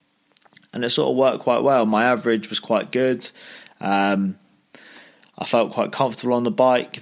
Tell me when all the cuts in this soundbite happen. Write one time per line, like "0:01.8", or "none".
none

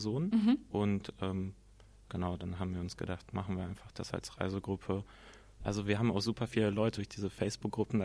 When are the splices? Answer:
0:05.6
0:07.0

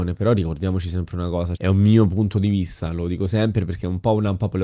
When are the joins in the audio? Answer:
0:01.6

